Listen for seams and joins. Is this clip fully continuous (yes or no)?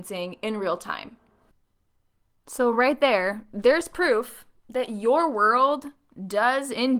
yes